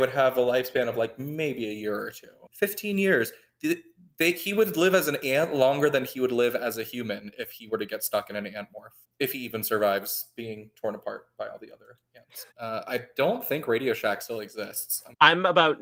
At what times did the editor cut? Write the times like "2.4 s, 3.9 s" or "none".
12.5 s